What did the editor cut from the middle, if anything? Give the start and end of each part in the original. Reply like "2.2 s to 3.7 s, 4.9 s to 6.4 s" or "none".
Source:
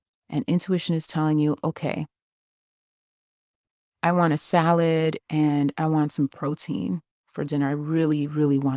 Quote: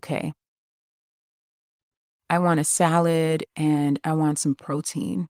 none